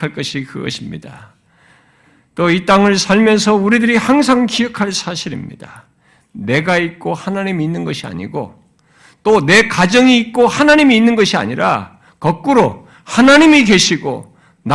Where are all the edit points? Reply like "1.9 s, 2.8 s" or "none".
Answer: none